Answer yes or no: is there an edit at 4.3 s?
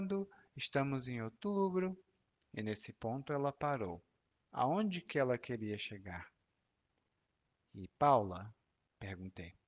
yes